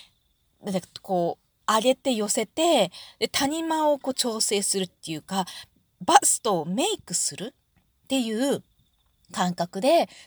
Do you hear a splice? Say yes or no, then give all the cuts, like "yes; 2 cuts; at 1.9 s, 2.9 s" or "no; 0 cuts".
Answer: no; 0 cuts